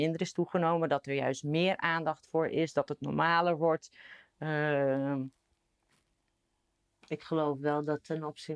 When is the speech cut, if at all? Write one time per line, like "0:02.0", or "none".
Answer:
none